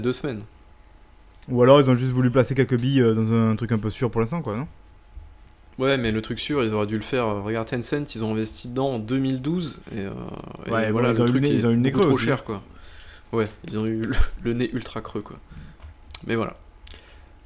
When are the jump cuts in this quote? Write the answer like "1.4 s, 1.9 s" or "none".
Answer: none